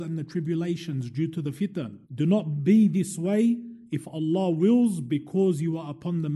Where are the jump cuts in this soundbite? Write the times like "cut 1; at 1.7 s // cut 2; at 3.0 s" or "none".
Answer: cut 1; at 2.0 s